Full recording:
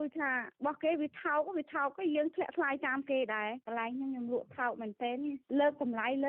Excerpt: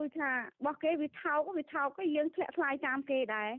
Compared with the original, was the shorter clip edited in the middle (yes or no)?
no